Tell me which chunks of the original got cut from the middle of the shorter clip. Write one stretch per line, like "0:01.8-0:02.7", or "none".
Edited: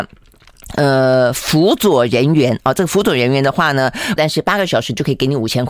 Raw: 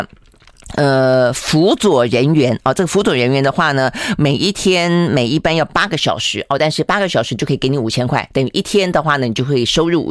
0:04.2-0:06.6